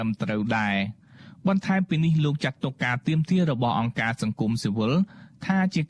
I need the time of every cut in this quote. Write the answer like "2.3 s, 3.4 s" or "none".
none